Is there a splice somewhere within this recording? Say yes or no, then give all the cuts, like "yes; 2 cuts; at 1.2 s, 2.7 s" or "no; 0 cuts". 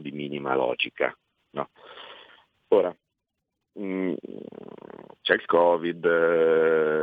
no; 0 cuts